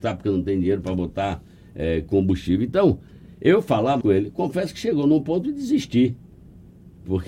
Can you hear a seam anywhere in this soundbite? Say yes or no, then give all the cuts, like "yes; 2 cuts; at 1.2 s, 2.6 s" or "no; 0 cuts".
yes; 1 cut; at 4.0 s